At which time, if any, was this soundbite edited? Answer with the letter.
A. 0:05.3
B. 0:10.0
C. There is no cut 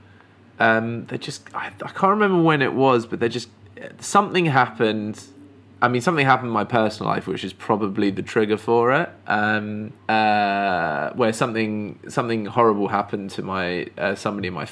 B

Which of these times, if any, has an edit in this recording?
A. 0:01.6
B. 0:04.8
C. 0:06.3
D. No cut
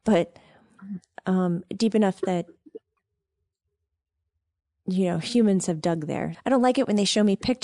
C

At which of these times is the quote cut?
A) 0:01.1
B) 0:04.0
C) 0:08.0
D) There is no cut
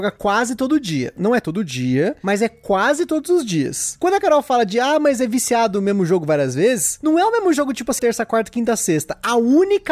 C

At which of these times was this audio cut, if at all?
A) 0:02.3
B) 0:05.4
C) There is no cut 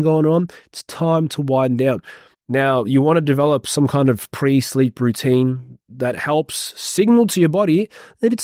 A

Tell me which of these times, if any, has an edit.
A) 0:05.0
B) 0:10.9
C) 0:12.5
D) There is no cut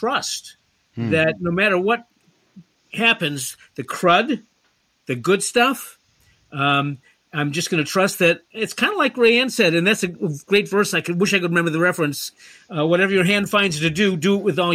D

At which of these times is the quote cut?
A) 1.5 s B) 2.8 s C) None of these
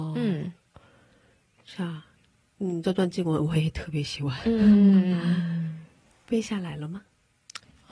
C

